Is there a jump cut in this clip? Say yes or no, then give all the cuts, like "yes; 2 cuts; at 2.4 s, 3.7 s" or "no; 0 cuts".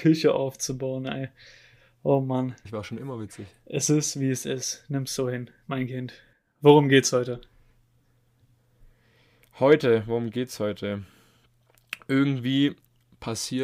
yes; 1 cut; at 2.7 s